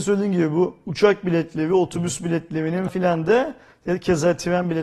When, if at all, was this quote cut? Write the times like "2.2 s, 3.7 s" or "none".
2.9 s